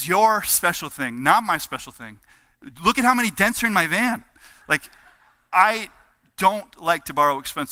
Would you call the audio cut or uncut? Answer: uncut